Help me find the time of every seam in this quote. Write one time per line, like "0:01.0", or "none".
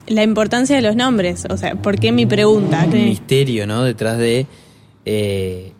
0:02.9